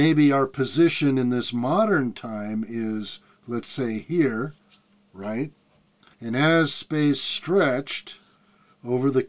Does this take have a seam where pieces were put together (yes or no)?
yes